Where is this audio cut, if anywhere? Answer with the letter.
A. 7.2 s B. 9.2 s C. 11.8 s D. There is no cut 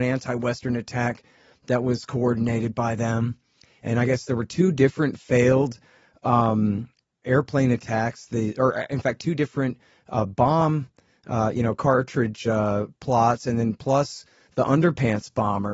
A